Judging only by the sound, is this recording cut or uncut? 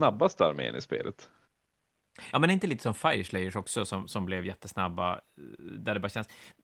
uncut